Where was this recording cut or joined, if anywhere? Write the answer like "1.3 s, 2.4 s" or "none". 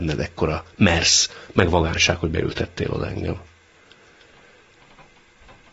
none